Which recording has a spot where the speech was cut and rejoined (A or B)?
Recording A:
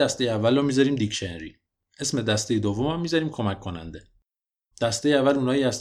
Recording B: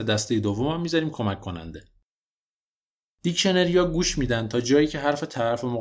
A